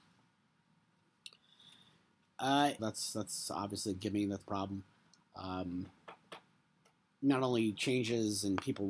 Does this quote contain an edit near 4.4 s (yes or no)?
yes